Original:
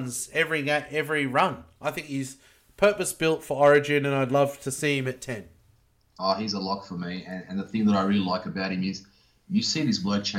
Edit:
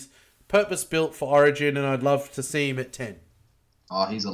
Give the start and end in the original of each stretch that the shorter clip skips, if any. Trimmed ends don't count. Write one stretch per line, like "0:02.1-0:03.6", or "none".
none